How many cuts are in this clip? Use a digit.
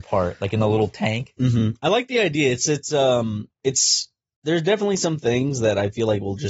0